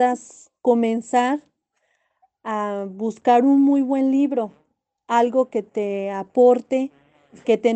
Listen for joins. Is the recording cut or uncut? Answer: uncut